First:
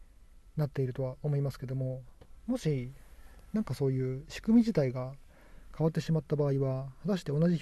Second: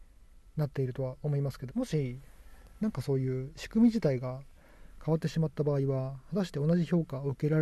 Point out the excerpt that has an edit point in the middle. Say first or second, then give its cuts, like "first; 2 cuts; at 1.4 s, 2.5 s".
second; 1 cut; at 1.7 s